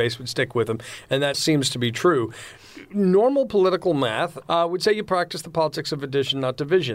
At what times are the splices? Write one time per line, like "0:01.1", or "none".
0:01.3
0:04.4